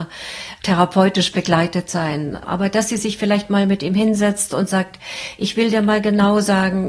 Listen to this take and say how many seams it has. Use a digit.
0